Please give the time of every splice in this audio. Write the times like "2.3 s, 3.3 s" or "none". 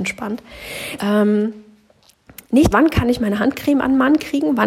1.0 s, 2.7 s